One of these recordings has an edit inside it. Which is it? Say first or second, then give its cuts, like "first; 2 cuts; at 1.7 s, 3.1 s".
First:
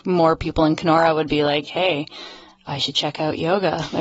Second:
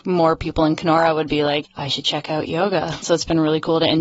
second; 2 cuts; at 1.6 s, 3.0 s